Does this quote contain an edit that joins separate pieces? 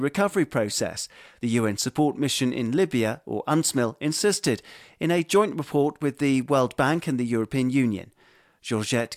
no; 0 cuts

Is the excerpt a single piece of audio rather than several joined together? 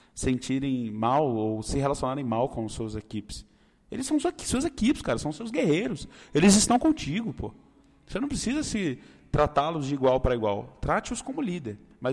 yes; 0 cuts

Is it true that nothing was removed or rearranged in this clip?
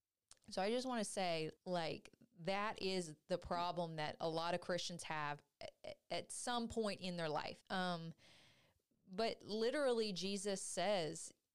no; 2 cuts; at 1.6 s, 7.6 s

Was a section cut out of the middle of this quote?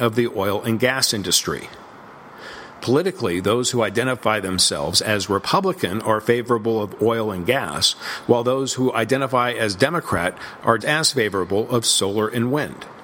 yes; 1 cut; at 10.8 s

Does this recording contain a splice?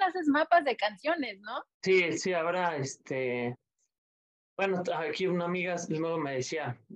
yes; 1 cut; at 1.7 s

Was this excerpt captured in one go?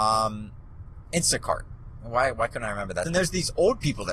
no; 1 cut; at 3.1 s

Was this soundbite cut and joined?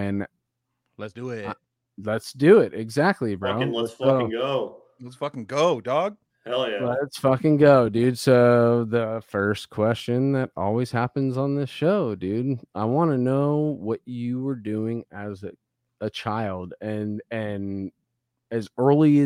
no; 0 cuts

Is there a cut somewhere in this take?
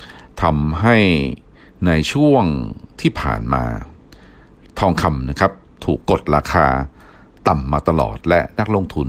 yes; 1 cut; at 6.0 s

